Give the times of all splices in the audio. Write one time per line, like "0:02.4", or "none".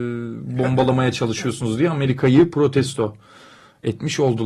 none

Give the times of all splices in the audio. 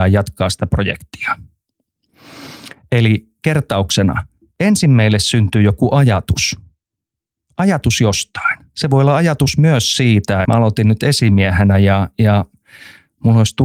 0:10.4

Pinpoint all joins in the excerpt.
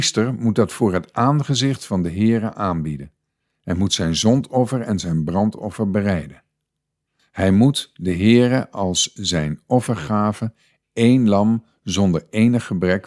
0:07.2

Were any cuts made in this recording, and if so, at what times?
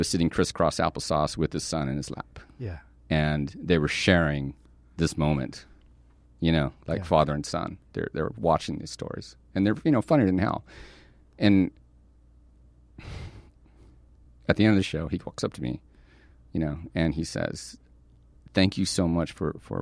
none

